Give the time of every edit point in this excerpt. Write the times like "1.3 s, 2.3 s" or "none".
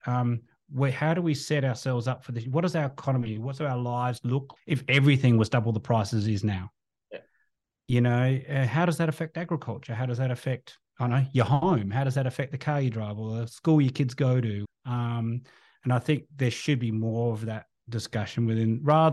4.6 s, 14.6 s